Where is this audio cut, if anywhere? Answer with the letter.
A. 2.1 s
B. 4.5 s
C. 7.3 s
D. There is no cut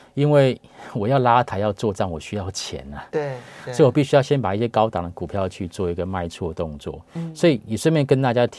D